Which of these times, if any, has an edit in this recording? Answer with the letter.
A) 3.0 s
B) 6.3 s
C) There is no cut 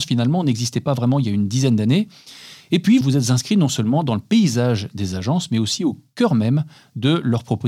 A